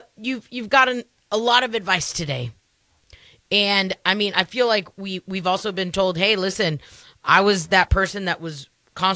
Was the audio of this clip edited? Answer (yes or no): no